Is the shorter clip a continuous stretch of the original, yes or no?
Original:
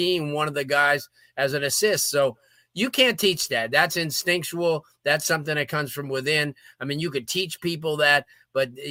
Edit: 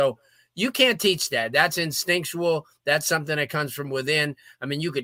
yes